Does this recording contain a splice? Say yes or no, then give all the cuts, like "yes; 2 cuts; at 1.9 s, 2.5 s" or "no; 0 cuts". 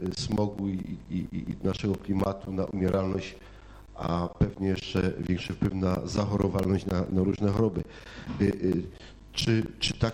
no; 0 cuts